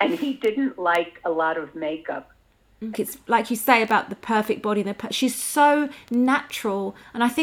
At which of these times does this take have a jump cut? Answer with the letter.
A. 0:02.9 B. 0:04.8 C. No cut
A